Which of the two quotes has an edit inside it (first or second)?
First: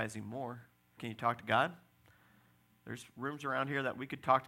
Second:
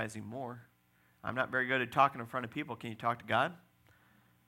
first